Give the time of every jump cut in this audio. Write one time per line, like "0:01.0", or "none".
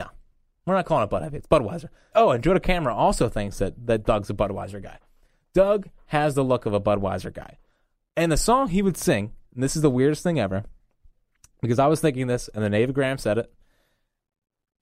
0:02.1